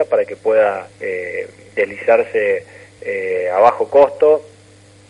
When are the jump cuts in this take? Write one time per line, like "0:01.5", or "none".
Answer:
0:00.9